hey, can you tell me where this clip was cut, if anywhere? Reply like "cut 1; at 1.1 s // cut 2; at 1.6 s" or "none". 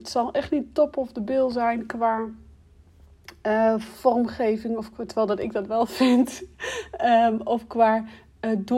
none